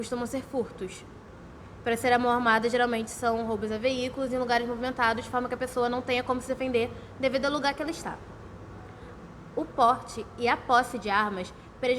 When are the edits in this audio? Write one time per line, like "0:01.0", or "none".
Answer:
none